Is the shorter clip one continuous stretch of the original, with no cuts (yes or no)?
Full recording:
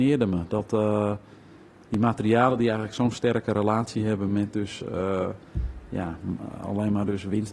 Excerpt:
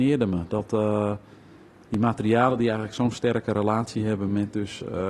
yes